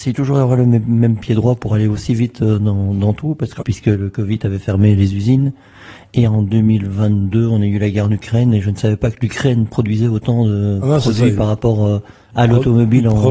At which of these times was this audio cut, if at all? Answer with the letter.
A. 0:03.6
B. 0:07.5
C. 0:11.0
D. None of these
A